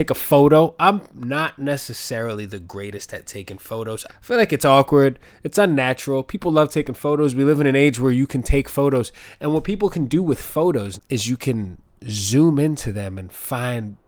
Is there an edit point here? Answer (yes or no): yes